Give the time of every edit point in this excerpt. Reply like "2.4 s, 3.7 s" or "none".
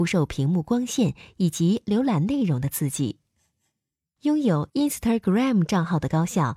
4.2 s